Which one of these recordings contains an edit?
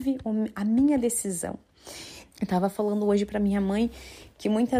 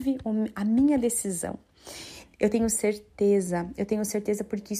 first; 1 cut; at 2.3 s

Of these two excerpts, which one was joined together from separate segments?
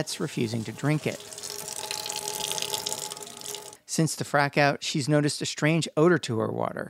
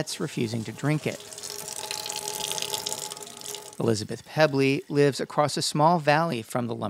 first; 1 cut; at 3.8 s

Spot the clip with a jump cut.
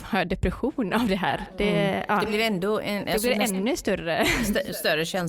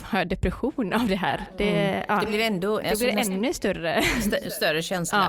second; 1 cut; at 2.8 s

